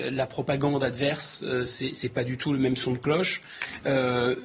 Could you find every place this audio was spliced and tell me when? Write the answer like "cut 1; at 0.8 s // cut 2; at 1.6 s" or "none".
none